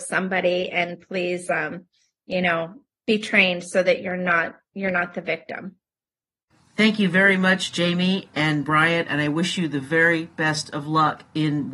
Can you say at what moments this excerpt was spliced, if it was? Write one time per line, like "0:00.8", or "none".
none